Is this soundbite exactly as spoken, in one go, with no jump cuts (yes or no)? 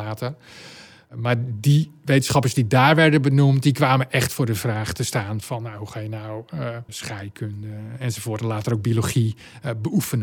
no